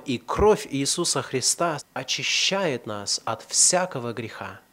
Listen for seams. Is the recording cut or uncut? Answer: cut